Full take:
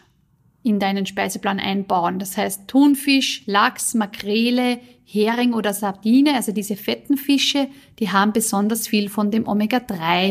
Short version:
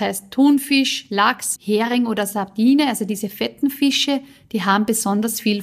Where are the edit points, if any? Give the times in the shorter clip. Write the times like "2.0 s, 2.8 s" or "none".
1.6 s